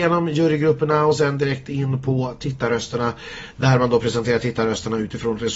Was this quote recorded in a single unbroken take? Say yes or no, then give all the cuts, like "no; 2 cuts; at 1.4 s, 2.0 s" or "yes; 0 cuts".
yes; 0 cuts